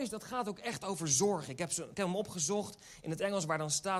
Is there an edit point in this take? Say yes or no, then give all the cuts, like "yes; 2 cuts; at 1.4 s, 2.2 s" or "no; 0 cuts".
no; 0 cuts